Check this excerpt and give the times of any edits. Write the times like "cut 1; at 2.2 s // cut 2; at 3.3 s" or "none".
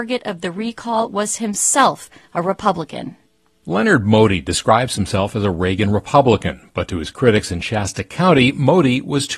none